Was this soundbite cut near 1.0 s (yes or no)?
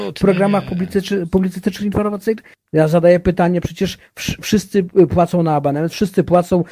no